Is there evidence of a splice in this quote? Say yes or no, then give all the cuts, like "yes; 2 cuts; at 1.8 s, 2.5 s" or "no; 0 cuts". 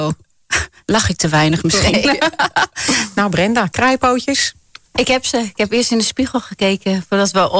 no; 0 cuts